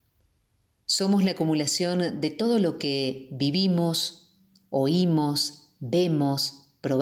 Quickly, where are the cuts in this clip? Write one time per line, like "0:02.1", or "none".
none